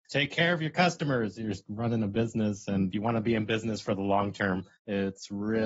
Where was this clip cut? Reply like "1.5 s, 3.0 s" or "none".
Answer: 4.7 s